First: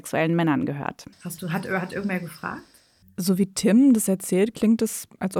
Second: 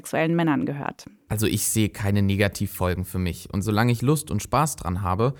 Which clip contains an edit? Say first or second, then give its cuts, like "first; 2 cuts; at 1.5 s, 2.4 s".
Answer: first; 2 cuts; at 1.1 s, 3.0 s